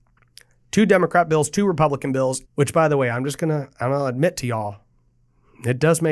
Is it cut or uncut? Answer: cut